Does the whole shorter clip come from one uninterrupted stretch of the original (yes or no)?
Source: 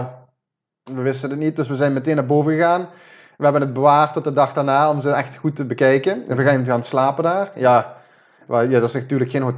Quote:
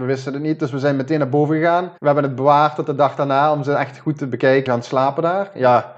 no